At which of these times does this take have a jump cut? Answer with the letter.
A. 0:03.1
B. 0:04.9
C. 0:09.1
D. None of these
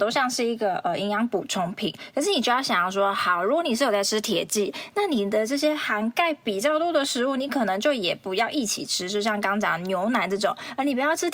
D